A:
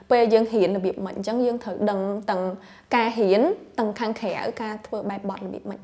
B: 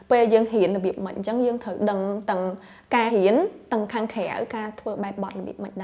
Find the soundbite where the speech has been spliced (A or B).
B